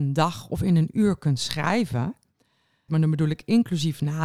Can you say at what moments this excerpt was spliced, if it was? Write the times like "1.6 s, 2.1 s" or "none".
2.9 s